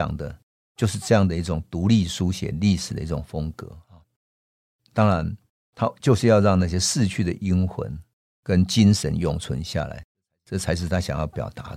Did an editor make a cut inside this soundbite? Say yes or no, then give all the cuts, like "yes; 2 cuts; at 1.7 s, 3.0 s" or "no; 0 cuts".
no; 0 cuts